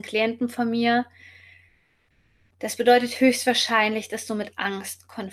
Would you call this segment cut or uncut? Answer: uncut